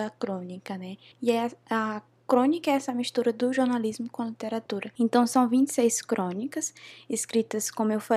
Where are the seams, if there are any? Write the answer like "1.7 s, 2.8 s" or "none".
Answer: 1.1 s